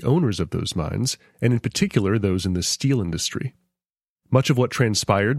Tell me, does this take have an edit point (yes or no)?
yes